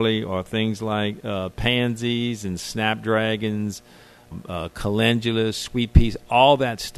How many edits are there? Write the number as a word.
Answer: one